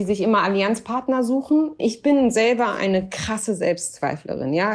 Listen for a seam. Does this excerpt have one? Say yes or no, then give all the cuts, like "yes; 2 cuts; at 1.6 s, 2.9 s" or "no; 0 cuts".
yes; 1 cut; at 1.8 s